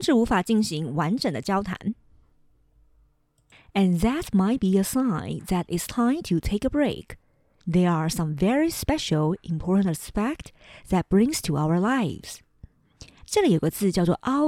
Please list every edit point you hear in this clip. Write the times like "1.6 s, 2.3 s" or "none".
7.6 s, 13.2 s